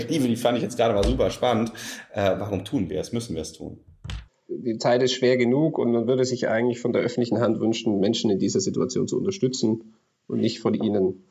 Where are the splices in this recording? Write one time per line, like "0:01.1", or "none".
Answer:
0:04.3